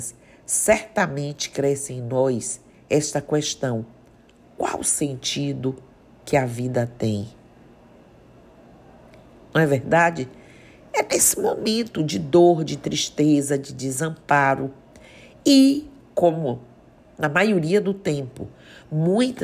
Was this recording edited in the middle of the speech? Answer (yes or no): no